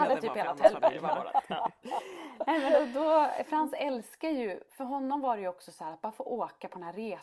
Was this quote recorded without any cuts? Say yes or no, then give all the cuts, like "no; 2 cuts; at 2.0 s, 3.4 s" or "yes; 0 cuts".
yes; 0 cuts